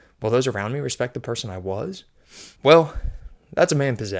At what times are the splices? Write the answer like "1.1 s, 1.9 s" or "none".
2.6 s